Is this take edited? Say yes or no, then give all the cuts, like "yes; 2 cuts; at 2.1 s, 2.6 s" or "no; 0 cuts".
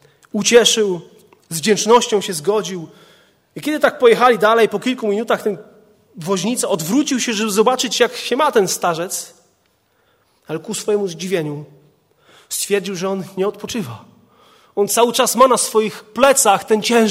no; 0 cuts